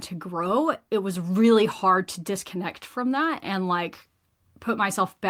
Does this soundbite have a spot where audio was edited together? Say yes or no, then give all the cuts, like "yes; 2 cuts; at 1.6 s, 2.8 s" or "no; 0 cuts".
no; 0 cuts